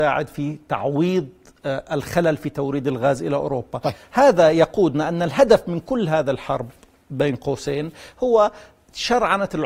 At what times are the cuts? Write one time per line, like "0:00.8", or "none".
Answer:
none